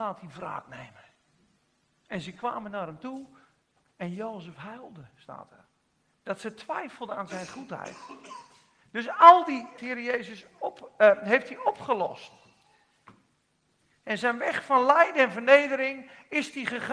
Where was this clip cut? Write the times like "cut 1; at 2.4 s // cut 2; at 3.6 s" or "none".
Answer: cut 1; at 9.8 s